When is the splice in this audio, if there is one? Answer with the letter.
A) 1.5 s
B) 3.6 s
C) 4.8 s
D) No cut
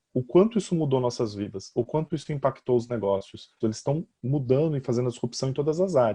B